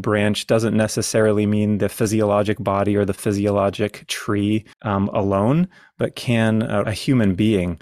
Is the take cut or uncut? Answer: cut